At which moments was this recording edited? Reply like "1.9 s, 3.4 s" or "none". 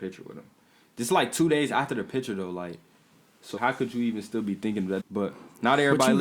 3.6 s, 5.0 s